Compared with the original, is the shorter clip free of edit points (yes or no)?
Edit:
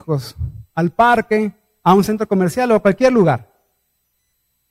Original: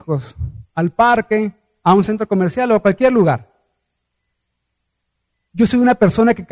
yes